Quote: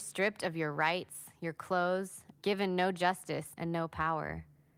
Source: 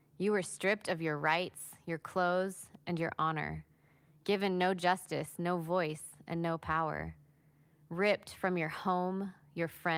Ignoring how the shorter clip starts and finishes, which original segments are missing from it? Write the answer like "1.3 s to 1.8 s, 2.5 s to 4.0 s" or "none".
2.8 s to 4.2 s, 5.4 s to 6.2 s